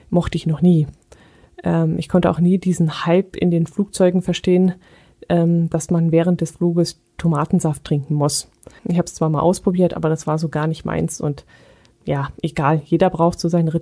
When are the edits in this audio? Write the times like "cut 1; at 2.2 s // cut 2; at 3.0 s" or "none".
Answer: cut 1; at 8.8 s

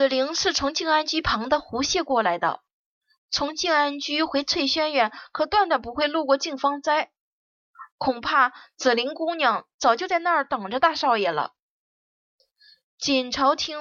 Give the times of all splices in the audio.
none

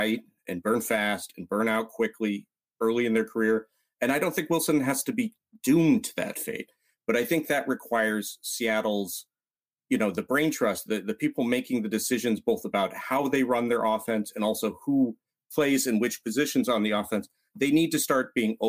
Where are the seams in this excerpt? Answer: cut 1; at 10.9 s

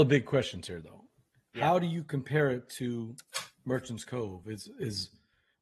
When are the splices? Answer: none

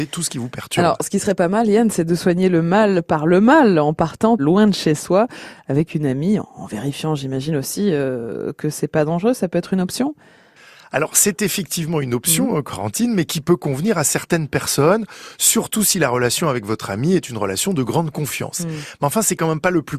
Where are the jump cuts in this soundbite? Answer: cut 1; at 4.4 s

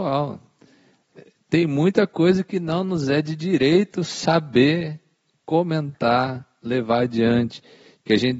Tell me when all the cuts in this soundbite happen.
none

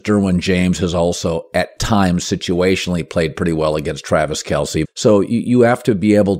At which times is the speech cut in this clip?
cut 1; at 4.8 s

